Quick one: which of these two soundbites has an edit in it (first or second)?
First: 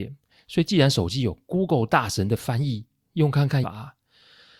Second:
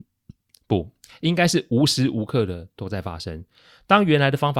first